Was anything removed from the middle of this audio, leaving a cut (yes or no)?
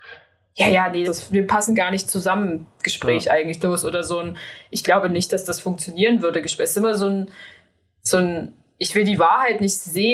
yes